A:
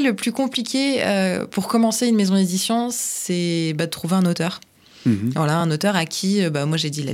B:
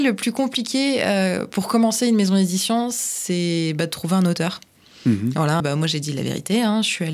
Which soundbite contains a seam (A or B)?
B